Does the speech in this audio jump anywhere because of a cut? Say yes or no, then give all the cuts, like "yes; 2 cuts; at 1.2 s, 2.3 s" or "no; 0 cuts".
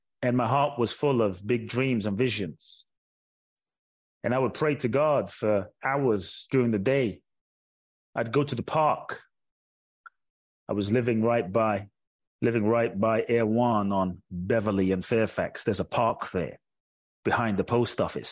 yes; 1 cut; at 12.2 s